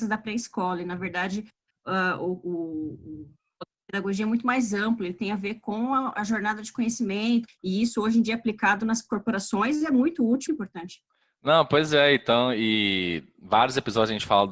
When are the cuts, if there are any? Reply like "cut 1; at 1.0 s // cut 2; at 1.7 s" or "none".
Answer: cut 1; at 7.5 s // cut 2; at 10.5 s